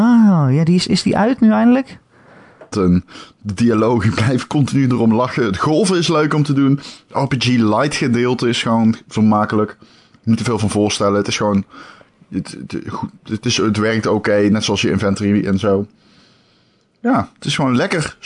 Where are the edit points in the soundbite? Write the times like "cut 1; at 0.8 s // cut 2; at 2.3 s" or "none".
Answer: cut 1; at 2.7 s